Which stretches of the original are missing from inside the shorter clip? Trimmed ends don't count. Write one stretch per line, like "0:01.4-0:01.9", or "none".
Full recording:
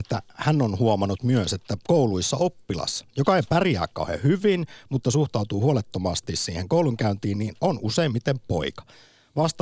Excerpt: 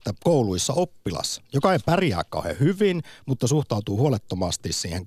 none